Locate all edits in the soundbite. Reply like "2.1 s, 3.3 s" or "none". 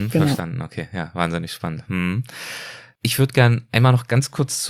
none